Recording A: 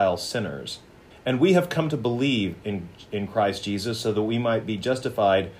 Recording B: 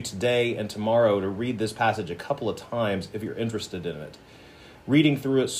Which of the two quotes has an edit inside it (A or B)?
A